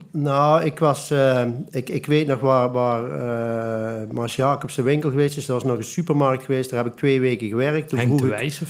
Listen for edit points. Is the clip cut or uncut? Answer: uncut